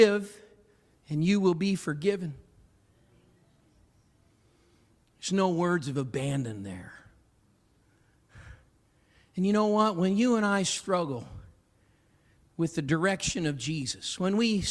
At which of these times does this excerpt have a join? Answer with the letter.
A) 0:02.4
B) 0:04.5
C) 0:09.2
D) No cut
D